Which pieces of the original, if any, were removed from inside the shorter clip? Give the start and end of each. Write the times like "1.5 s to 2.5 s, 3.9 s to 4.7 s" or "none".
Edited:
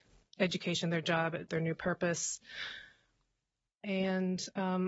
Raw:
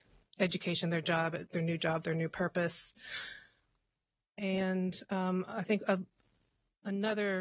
1.5 s to 2.0 s